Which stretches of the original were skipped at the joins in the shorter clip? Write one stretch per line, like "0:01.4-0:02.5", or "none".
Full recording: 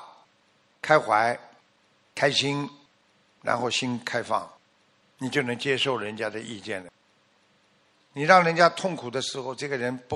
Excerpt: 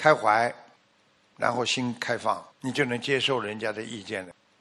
0:02.0-0:03.2
0:04.6-0:05.1